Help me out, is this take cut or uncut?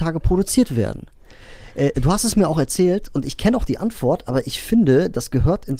cut